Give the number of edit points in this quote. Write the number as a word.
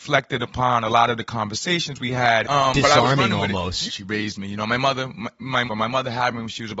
three